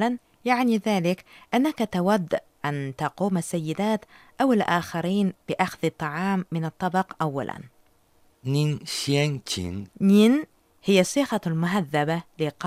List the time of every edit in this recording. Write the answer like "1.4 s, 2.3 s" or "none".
9.9 s